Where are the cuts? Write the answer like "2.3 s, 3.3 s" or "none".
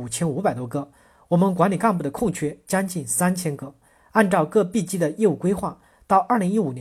none